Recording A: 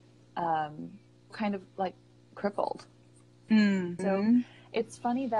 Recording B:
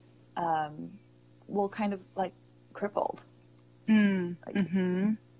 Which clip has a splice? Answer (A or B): A